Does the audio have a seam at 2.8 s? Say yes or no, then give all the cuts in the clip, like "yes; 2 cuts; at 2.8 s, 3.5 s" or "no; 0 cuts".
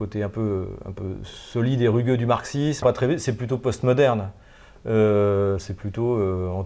yes; 1 cut; at 2.8 s